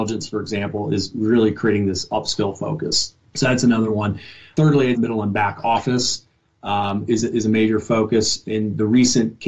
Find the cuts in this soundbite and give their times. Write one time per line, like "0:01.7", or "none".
0:04.9